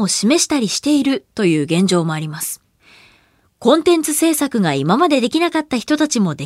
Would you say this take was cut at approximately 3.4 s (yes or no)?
yes